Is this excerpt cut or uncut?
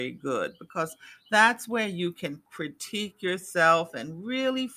uncut